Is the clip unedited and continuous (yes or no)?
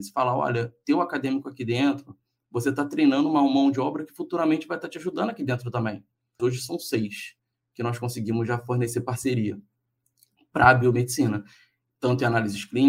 no